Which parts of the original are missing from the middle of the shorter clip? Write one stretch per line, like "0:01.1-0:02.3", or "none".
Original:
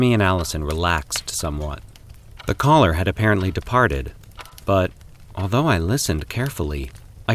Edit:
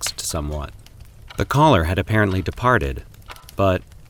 none